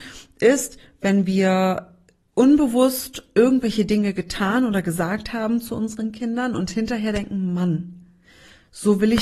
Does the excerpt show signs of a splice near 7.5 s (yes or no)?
no